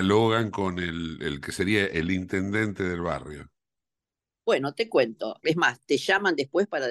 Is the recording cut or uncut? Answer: cut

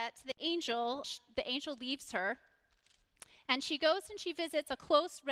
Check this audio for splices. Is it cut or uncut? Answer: cut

